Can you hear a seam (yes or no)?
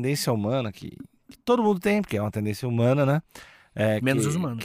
no